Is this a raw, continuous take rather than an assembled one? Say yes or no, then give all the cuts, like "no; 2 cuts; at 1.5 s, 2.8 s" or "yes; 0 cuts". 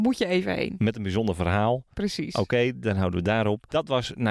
yes; 0 cuts